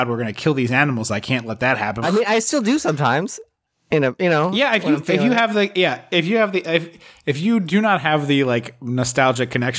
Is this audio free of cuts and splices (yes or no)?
no